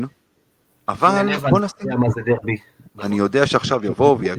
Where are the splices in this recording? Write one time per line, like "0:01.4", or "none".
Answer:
0:02.9